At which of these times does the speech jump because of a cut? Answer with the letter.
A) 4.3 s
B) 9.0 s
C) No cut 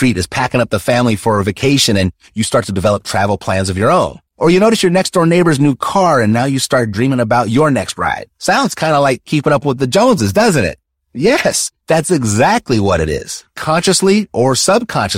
A